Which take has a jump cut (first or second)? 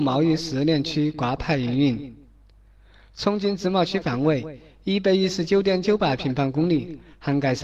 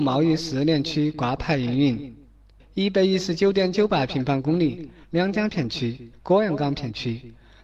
second